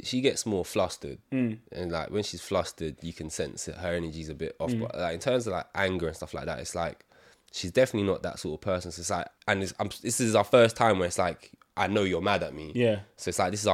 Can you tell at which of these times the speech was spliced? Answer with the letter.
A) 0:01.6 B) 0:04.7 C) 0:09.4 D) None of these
C